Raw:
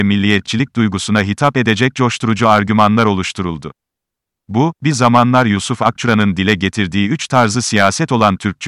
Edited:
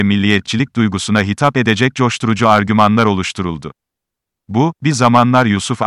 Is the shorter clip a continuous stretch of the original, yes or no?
yes